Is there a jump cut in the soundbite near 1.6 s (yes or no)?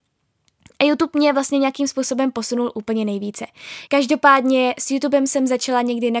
no